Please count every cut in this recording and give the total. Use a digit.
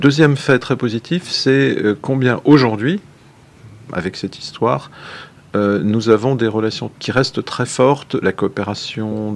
2